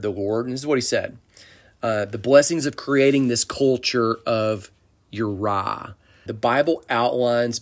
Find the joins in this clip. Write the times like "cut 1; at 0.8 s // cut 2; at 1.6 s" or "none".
cut 1; at 6.3 s